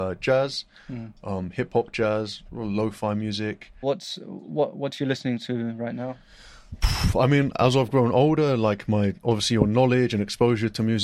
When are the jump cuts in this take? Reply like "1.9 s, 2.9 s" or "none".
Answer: 3.8 s

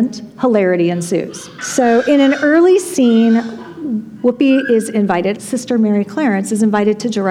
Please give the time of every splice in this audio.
1.6 s, 5.4 s

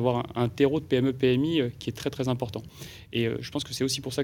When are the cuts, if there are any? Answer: none

